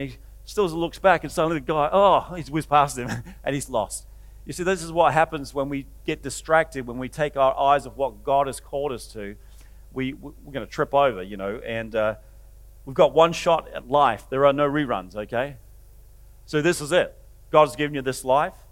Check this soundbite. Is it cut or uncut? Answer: uncut